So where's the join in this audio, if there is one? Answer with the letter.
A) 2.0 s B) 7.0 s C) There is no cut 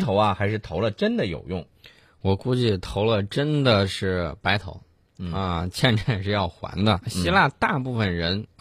B